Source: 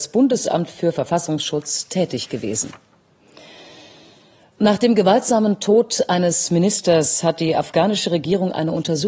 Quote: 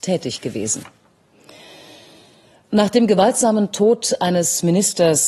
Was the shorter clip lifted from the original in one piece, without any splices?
yes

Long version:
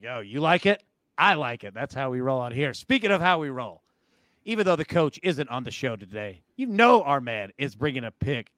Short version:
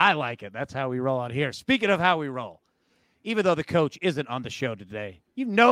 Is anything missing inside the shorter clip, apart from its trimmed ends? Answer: no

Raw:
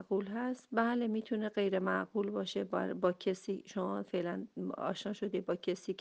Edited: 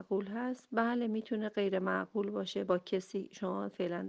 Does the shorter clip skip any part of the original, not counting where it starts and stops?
yes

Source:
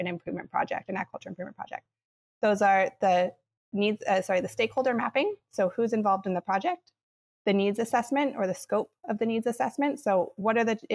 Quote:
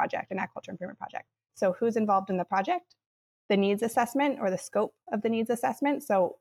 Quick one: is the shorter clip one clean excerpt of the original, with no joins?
no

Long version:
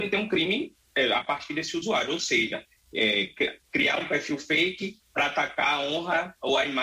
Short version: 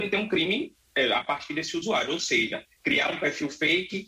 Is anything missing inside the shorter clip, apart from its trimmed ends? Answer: yes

